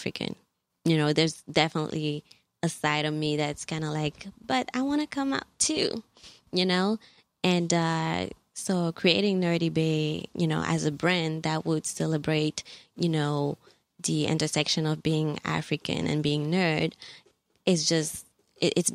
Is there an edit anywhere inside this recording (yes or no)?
no